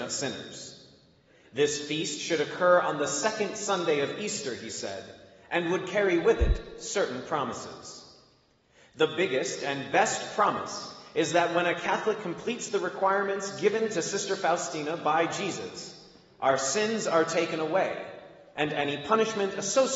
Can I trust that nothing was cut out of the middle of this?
yes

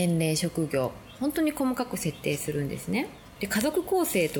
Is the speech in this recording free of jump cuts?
no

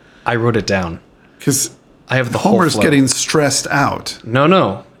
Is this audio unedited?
yes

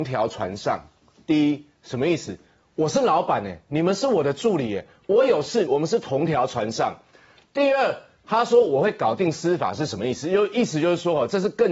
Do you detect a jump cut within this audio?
yes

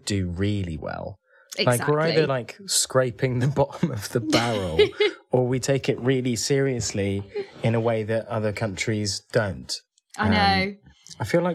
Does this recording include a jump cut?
no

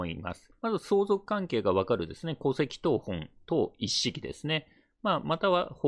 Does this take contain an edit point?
no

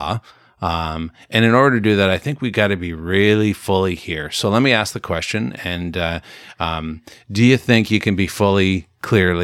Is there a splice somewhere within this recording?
no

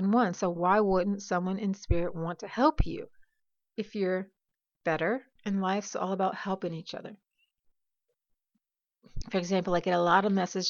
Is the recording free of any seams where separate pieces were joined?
no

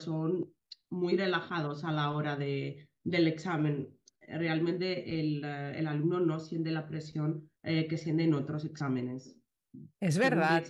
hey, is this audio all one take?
no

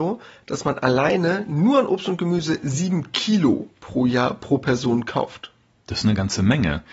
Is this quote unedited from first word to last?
yes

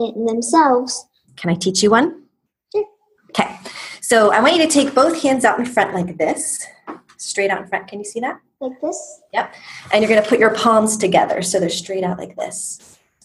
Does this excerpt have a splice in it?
yes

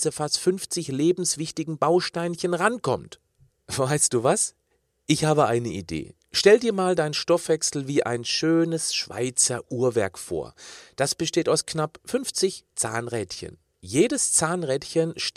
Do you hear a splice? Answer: no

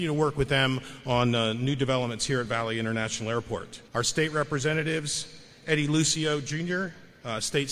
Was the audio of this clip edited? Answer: yes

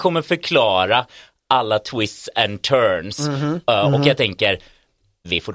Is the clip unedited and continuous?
yes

